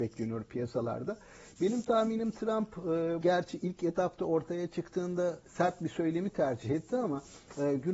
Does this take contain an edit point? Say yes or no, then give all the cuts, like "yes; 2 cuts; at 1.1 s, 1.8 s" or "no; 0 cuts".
yes; 1 cut; at 3.2 s